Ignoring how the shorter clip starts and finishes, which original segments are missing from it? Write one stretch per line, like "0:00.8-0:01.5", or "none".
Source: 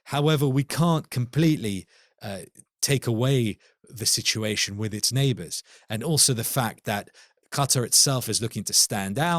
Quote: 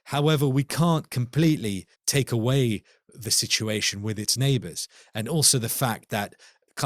0:01.9-0:02.7